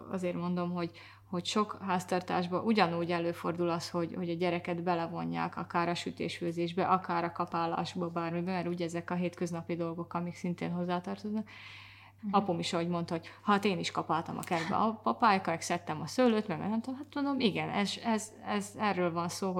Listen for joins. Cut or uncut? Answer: cut